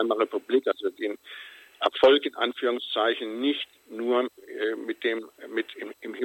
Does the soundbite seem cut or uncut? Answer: uncut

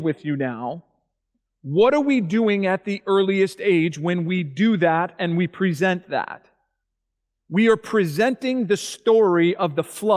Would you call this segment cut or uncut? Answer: uncut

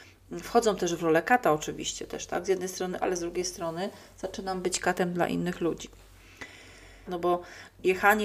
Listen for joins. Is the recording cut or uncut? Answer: cut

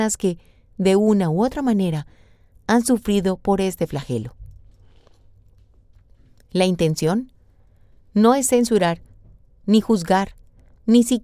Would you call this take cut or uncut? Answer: uncut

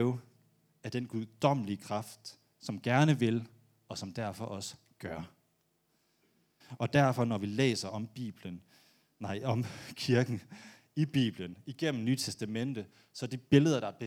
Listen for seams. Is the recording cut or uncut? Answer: uncut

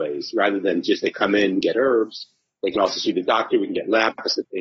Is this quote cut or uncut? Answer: uncut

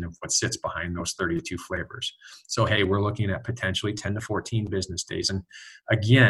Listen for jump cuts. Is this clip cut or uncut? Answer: uncut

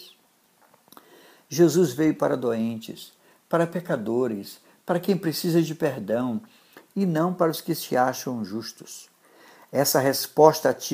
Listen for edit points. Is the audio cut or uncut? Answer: uncut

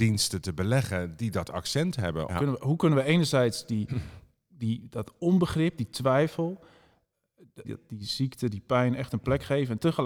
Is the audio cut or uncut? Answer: cut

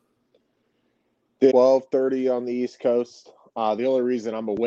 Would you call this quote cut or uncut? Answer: cut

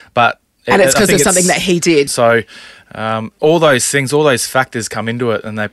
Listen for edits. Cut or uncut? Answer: cut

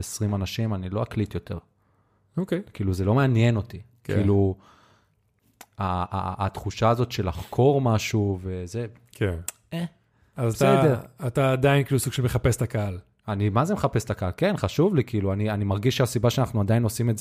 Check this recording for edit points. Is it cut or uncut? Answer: uncut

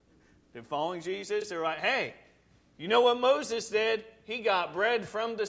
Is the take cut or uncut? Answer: uncut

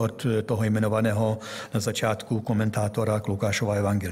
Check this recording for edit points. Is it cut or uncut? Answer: uncut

